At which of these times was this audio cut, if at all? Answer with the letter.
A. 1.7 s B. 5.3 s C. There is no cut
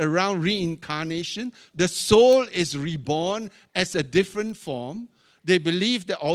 A